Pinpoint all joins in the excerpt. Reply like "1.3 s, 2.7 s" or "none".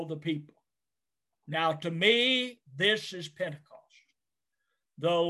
none